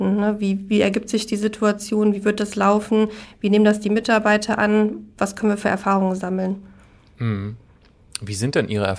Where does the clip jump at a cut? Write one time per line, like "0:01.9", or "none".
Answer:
none